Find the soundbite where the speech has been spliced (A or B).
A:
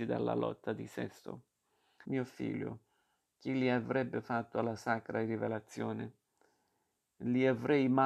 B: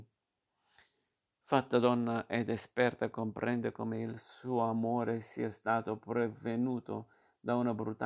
A